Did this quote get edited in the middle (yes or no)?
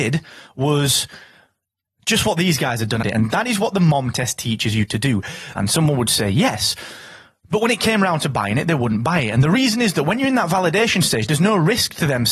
yes